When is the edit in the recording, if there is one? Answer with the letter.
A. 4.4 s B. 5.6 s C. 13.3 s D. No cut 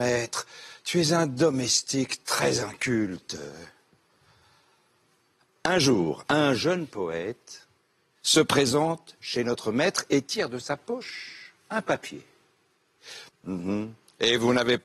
C